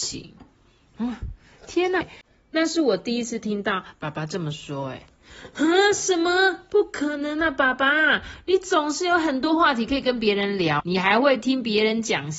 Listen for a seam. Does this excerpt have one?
yes; 2 cuts; at 2.0 s, 10.8 s

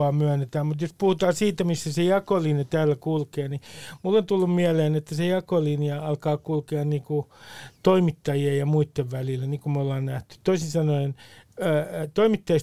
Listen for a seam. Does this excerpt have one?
no; 0 cuts

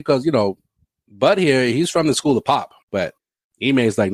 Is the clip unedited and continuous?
no; 1 cut; at 2.8 s

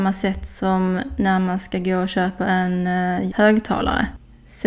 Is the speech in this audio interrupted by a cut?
yes; 1 cut; at 3.3 s

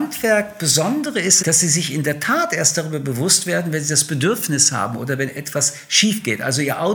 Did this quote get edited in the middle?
yes; 1 cut; at 1.4 s

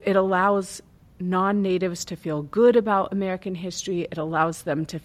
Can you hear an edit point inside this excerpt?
no; 0 cuts

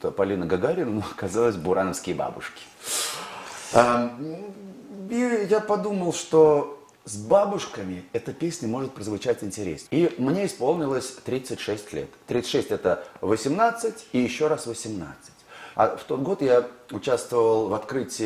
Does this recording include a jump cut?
yes; 2 cuts; at 9.9 s, 15.7 s

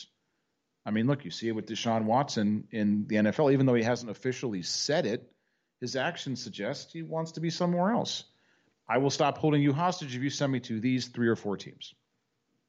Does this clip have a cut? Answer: yes; 1 cut; at 8.7 s

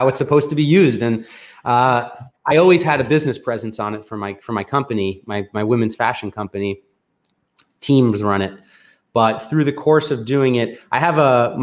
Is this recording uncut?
yes; 0 cuts

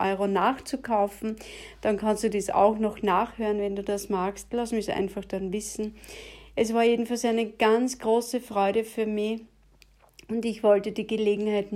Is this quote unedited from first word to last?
yes; 0 cuts

